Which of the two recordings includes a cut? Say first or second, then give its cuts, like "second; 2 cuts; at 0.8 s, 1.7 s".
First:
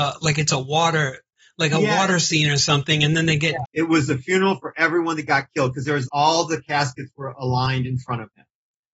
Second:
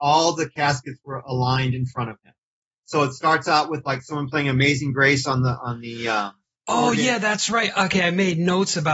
first; 2 cuts; at 3.6 s, 6.1 s